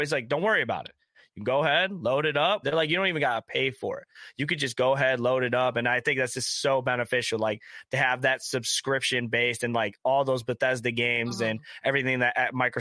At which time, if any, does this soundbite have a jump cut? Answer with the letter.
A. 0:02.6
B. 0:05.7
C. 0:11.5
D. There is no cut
A